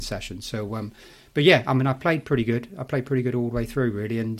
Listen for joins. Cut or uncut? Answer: uncut